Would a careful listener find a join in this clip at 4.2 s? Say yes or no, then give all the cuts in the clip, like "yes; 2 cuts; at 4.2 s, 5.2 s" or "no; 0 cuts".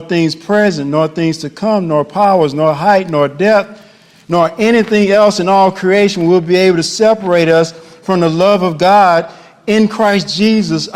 no; 0 cuts